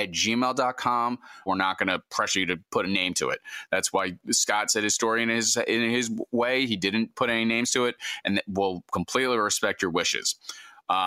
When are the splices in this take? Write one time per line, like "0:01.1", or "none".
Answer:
0:01.5